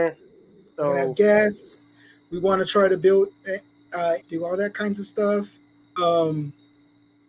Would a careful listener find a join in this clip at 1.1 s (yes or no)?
no